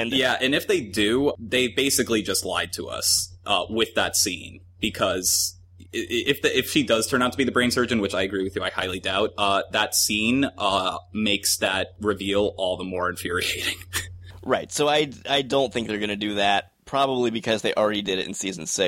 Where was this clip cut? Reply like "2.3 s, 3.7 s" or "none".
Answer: none